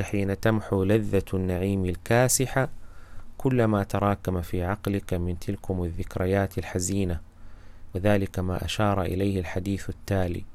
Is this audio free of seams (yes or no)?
no